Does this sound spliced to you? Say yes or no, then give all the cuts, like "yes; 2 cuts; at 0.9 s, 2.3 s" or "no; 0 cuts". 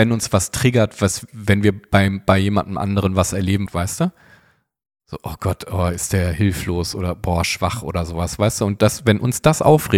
yes; 1 cut; at 3.7 s